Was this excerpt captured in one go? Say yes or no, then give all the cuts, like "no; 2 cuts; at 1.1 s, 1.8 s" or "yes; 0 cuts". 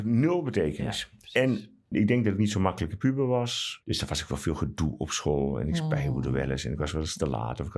no; 2 cuts; at 1.9 s, 3.8 s